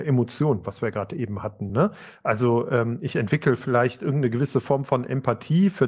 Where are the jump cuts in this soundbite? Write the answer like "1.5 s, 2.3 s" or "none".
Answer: none